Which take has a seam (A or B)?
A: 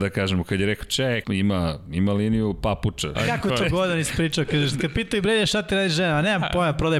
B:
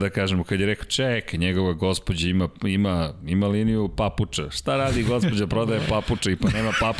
A